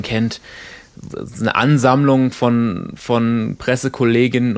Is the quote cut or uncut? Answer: uncut